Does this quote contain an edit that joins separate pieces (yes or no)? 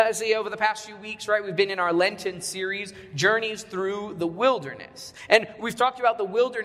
no